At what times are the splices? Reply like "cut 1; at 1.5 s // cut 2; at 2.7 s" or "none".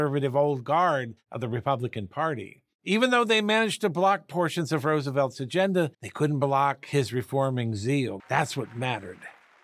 cut 1; at 5.9 s // cut 2; at 8.2 s